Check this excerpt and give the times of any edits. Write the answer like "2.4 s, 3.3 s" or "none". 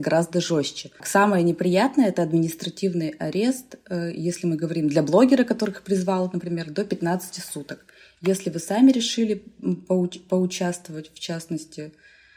1.0 s